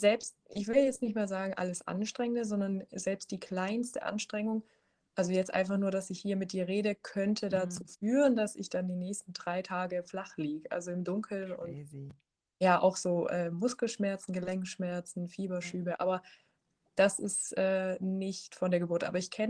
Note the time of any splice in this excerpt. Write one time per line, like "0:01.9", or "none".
none